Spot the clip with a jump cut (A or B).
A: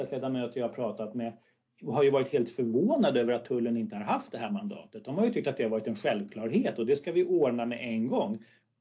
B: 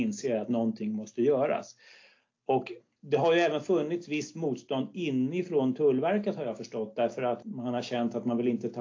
B